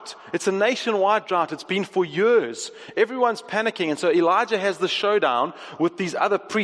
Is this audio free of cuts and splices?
yes; 0 cuts

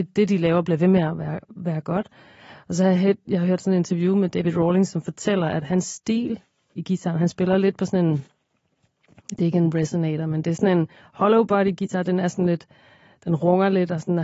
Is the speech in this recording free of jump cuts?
yes; 0 cuts

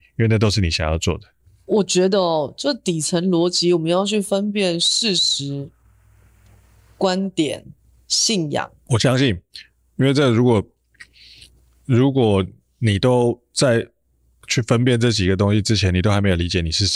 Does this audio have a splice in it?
yes; 1 cut; at 8.9 s

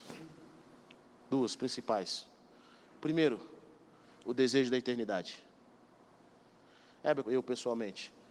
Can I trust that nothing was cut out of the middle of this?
no; 1 cut; at 7.2 s

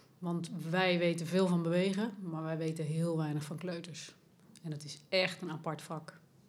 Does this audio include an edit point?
no; 0 cuts

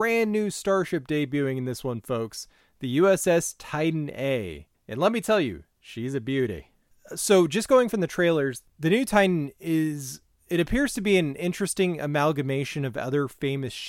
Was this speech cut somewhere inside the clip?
no; 0 cuts

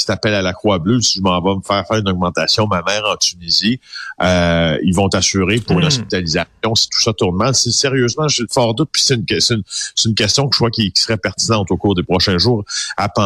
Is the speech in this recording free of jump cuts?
yes; 0 cuts

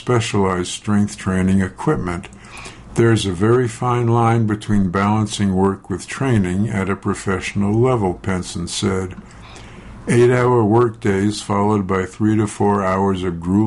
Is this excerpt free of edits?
no; 1 cut; at 2.9 s

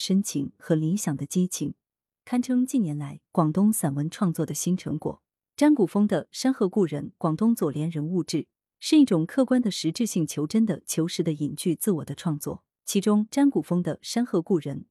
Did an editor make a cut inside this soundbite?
yes; 2 cuts; at 5.4 s, 12.7 s

